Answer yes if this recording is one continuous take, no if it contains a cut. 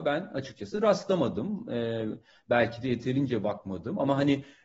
yes